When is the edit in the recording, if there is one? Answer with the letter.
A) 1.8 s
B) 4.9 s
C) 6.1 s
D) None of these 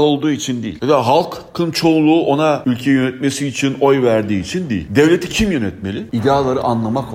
C